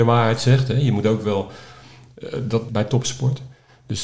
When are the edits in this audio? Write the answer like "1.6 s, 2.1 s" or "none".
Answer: 2.7 s